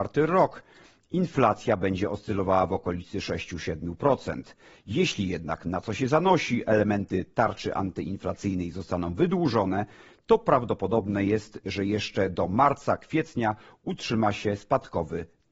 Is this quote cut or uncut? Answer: uncut